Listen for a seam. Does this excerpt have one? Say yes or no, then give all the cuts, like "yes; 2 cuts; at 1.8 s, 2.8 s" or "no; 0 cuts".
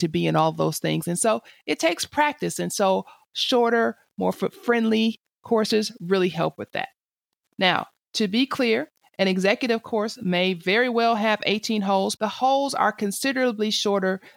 yes; 1 cut; at 12.2 s